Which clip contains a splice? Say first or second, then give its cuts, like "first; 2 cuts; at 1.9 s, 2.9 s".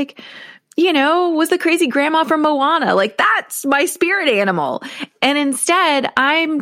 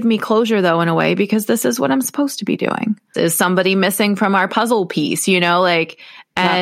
second; 1 cut; at 3.1 s